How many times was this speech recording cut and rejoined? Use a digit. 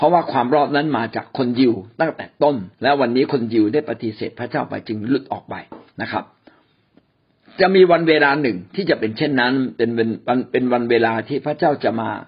1